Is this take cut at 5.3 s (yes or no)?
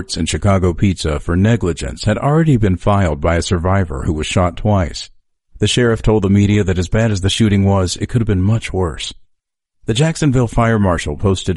no